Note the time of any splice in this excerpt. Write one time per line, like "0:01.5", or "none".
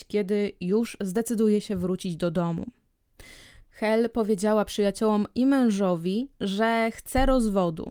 0:03.6